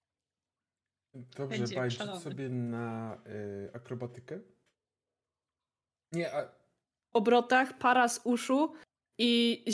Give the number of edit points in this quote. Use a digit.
1